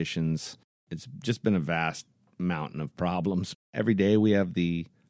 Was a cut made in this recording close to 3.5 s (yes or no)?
yes